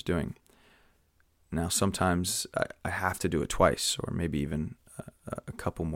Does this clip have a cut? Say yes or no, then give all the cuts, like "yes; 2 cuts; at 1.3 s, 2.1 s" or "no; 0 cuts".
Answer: no; 0 cuts